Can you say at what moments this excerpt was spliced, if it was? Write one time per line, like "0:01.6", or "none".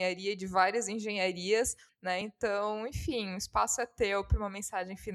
none